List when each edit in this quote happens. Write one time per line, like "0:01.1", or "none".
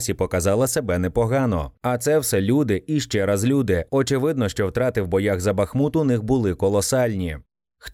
0:01.7